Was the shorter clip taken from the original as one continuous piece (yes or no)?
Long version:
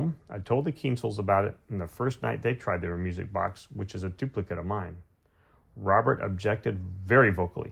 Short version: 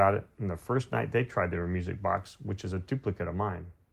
yes